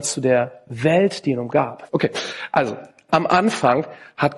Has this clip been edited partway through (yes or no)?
yes